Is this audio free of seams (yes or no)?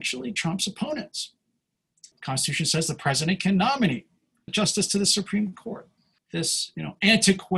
no